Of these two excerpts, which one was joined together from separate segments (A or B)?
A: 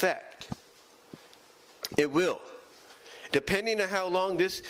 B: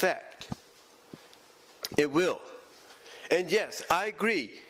A